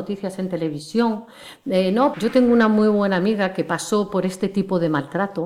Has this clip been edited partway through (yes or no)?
yes